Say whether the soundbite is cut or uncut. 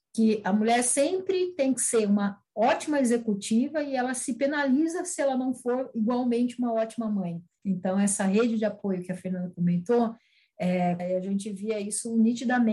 cut